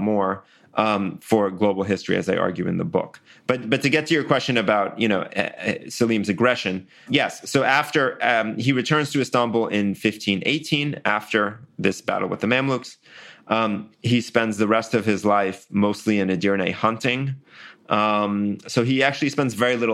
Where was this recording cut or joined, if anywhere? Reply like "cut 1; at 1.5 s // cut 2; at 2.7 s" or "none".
cut 1; at 7.1 s